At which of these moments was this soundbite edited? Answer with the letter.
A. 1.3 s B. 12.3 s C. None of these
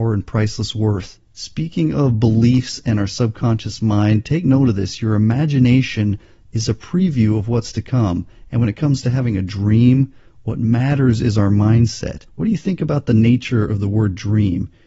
B